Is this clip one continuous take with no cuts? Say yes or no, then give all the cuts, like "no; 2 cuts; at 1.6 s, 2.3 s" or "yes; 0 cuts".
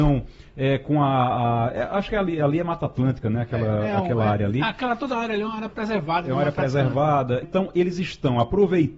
no; 1 cut; at 7.4 s